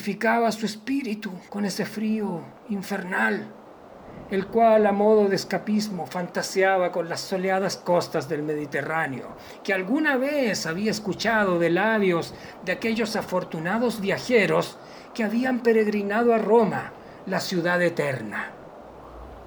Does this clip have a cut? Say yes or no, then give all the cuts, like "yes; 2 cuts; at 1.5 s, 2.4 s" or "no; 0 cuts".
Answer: yes; 1 cut; at 1.5 s